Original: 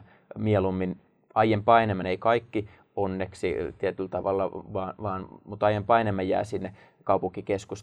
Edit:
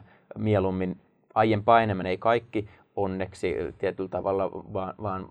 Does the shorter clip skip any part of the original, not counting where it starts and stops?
no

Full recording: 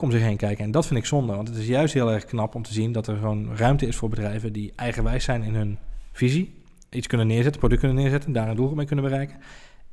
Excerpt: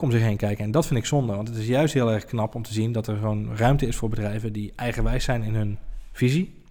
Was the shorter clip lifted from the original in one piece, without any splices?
yes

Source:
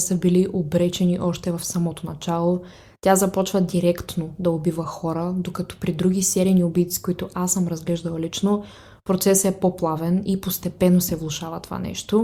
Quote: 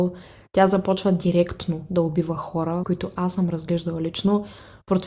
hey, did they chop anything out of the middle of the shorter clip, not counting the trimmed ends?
yes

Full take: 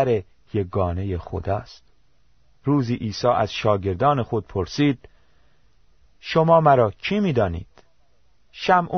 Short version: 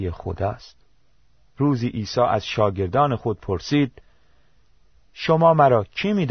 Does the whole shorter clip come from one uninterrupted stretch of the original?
yes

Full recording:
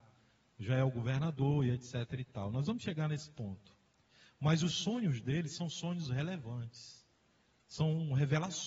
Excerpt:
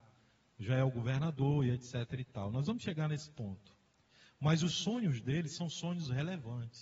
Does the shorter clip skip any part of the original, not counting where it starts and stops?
no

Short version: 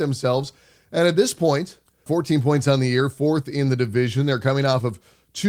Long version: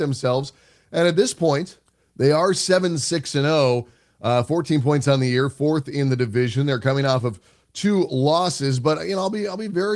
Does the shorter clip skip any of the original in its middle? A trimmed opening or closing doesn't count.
yes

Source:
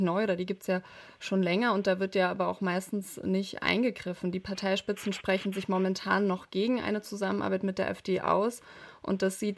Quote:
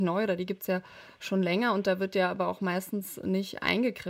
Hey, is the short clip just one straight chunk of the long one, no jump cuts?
yes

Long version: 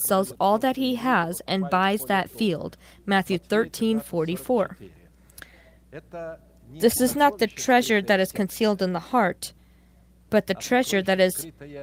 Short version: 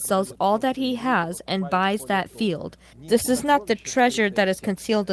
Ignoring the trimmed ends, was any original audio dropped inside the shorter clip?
yes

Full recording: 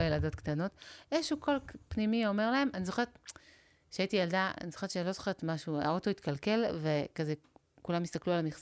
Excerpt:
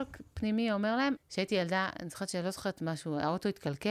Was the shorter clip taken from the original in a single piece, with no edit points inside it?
no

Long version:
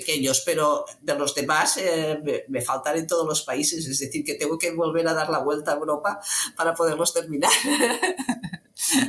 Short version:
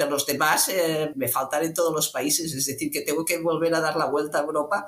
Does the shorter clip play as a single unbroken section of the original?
no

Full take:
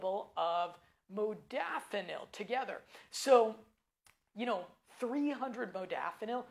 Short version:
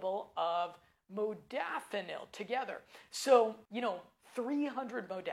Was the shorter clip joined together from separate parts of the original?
yes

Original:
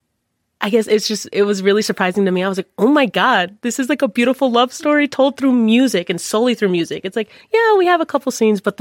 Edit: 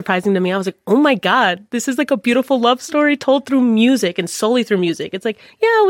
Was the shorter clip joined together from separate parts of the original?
no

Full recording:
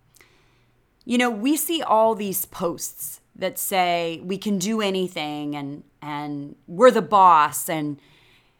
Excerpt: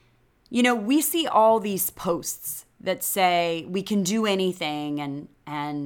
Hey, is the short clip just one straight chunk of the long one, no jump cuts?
yes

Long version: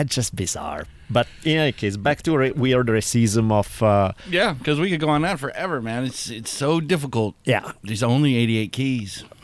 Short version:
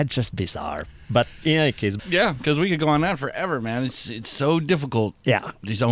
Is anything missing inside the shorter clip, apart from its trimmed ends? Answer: yes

